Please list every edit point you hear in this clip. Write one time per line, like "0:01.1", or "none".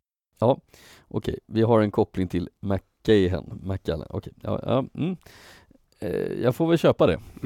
none